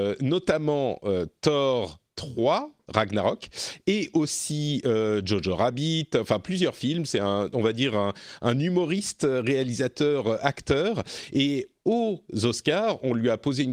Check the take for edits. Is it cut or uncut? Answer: uncut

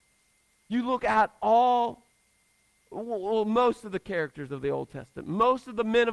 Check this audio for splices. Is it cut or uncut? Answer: uncut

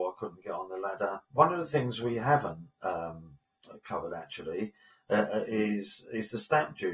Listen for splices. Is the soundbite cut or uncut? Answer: cut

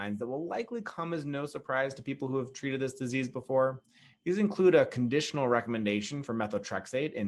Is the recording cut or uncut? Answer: uncut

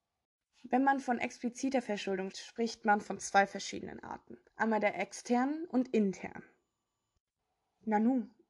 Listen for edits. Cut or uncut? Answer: cut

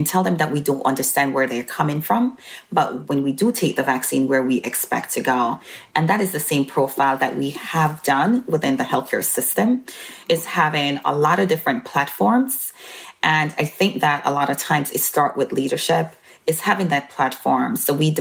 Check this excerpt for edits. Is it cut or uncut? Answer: uncut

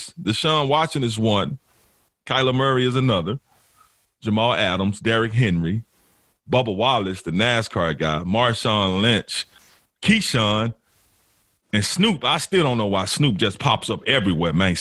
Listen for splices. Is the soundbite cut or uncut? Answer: uncut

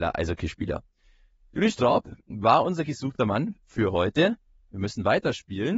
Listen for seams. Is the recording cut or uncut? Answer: uncut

